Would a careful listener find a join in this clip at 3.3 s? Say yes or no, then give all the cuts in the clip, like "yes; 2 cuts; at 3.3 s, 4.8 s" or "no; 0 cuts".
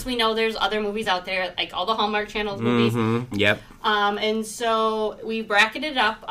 yes; 1 cut; at 3.3 s